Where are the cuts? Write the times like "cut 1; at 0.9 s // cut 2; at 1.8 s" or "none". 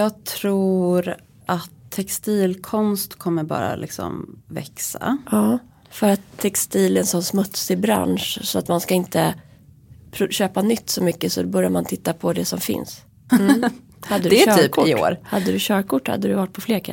cut 1; at 13.3 s